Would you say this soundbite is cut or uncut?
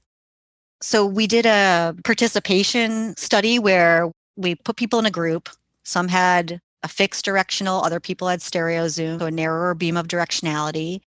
cut